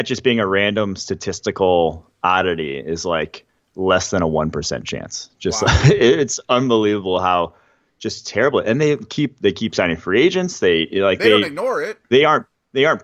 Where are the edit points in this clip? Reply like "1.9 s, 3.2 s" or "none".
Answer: none